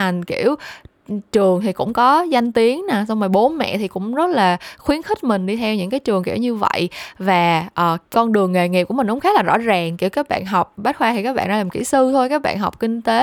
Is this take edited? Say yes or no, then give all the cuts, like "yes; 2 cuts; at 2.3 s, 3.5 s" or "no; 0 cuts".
yes; 1 cut; at 8.0 s